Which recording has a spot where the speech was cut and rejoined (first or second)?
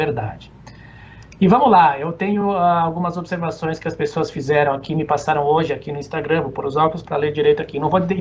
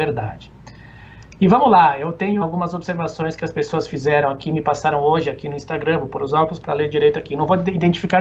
second